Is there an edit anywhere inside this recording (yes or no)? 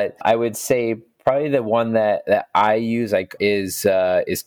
yes